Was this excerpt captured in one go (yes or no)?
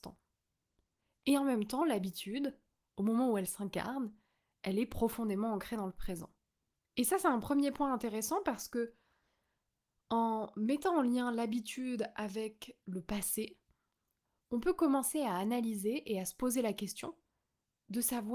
yes